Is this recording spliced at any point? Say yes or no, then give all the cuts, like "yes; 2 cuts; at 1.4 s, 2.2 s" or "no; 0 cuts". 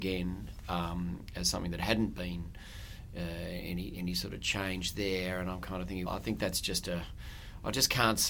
yes; 1 cut; at 6.1 s